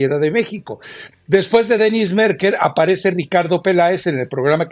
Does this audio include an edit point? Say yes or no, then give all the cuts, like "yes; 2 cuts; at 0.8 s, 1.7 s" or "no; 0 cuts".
yes; 1 cut; at 1.1 s